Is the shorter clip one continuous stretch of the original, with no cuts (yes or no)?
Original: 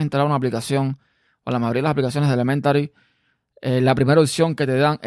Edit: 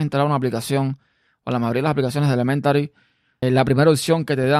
no